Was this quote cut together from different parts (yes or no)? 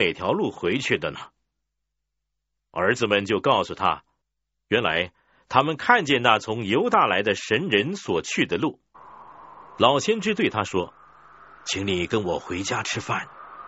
yes